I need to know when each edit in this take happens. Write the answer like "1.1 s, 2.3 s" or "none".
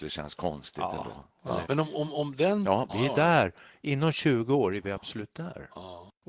1.6 s, 2.9 s